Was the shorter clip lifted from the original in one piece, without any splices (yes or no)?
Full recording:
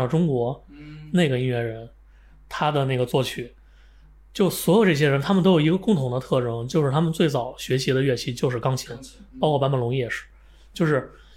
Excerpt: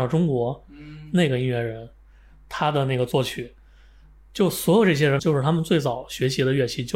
no